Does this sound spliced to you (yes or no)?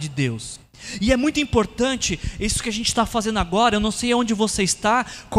no